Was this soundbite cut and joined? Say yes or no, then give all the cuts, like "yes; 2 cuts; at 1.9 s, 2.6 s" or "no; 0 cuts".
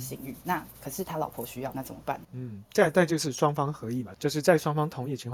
yes; 2 cuts; at 2.2 s, 4.1 s